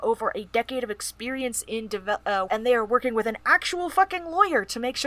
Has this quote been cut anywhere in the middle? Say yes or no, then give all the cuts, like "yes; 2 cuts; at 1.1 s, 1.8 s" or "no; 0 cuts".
yes; 1 cut; at 2.5 s